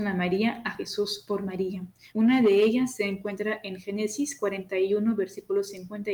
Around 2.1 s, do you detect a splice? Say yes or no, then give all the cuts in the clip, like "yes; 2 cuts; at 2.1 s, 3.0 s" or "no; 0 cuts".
yes; 1 cut; at 2.1 s